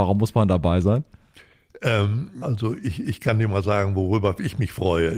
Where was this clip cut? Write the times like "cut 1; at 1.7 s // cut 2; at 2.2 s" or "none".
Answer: cut 1; at 2.4 s

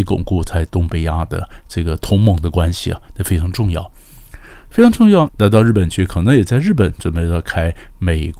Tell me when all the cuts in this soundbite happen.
cut 1; at 5.3 s

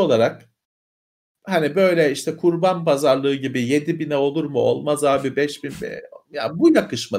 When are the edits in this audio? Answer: none

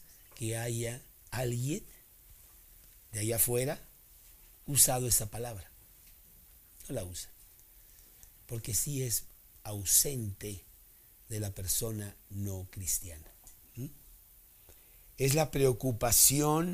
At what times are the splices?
none

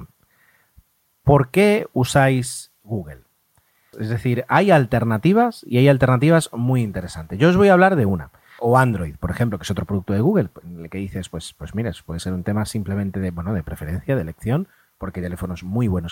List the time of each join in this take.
cut 1; at 3.9 s // cut 2; at 8.6 s

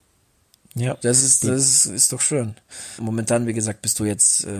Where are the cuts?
cut 1; at 1.0 s // cut 2; at 3.0 s

